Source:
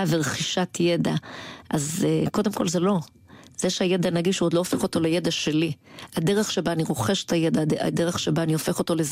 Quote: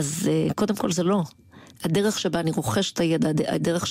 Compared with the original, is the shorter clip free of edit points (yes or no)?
no